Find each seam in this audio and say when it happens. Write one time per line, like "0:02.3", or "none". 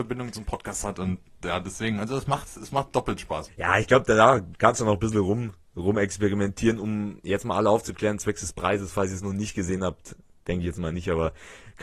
0:03.5